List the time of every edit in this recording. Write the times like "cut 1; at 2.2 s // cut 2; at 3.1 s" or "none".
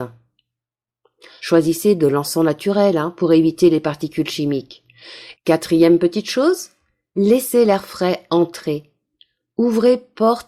cut 1; at 1.4 s // cut 2; at 5.3 s